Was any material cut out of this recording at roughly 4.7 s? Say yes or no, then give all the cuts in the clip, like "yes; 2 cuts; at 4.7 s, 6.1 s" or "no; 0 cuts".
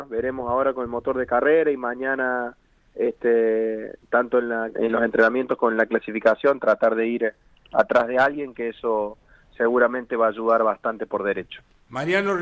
yes; 1 cut; at 4.7 s